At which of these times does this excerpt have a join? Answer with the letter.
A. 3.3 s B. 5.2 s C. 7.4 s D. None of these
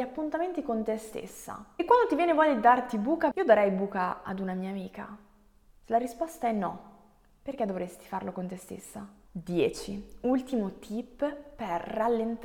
A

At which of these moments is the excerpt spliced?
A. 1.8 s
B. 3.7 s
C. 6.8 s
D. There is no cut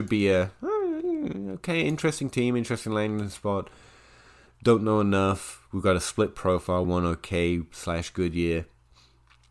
C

